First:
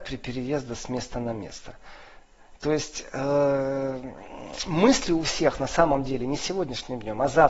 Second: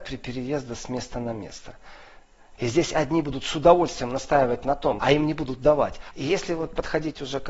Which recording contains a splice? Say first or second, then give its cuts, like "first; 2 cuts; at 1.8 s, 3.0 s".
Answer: second; 3 cuts; at 2.6 s, 5.0 s, 6.1 s